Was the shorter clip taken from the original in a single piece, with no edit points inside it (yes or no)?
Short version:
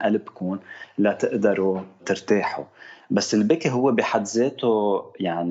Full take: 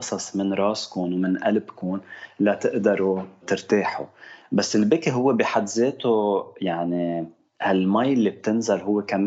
yes